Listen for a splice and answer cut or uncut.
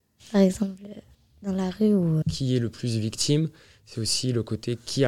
cut